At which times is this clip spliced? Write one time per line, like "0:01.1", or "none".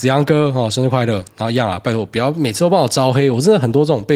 none

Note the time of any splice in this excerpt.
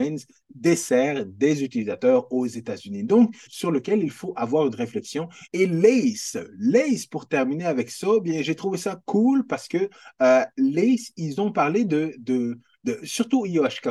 0:03.5
0:05.5

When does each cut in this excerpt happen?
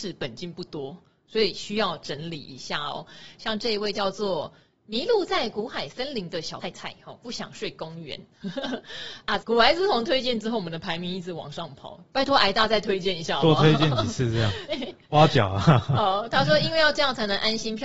0:06.6
0:09.4
0:14.7

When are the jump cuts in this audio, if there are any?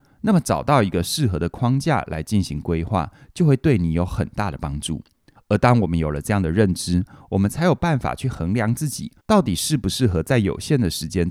0:05.4
0:09.2

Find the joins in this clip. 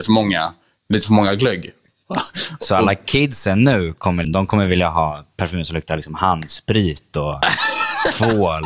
0:04.2

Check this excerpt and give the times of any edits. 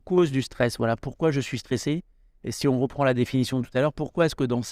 none

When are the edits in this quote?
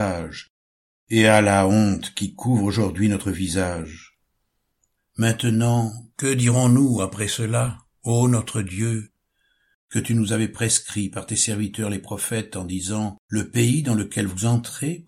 0:05.0
0:09.7
0:13.2

